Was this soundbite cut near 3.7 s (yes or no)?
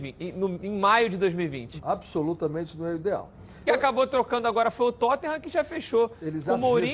yes